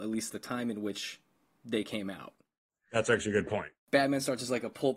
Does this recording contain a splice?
no; 0 cuts

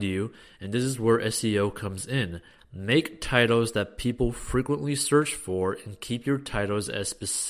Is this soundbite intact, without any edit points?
yes; 0 cuts

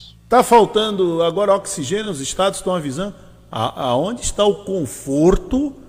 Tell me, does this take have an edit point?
no; 0 cuts

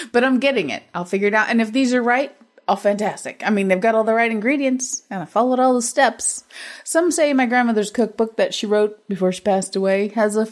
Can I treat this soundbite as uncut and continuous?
yes; 0 cuts

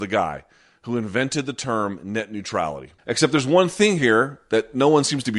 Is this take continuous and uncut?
no; 1 cut; at 3.0 s

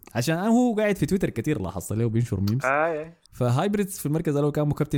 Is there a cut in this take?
yes; 1 cut; at 3.2 s

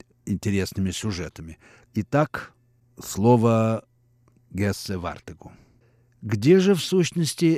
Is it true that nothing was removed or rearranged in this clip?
no; 1 cut; at 1.8 s

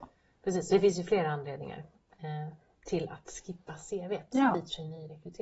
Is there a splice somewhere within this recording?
no; 0 cuts

